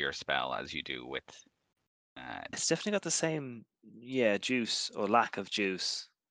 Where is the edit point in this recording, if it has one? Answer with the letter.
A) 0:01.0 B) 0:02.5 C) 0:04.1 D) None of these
B